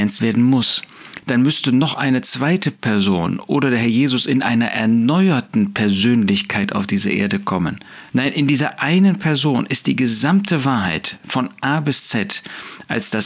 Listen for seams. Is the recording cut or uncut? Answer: cut